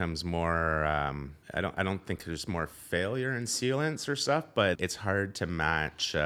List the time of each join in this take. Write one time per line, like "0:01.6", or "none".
0:01.4
0:04.8